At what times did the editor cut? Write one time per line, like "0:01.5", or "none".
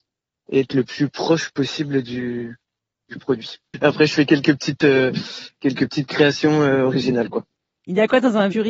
none